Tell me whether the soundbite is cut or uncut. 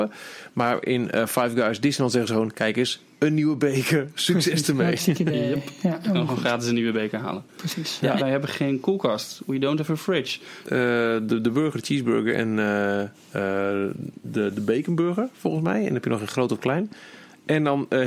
cut